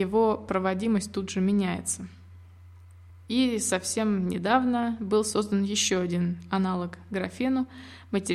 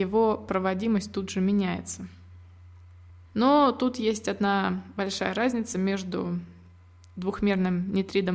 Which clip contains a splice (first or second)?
second